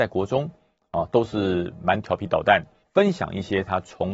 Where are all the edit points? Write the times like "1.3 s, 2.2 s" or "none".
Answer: 2.8 s